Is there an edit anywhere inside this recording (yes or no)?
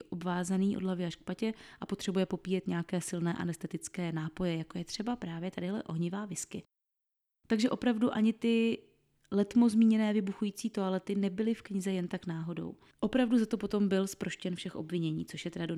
yes